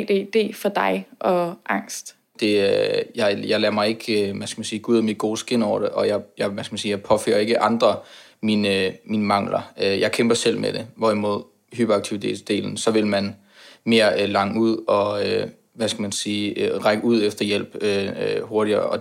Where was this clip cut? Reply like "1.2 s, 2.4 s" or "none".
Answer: 2.3 s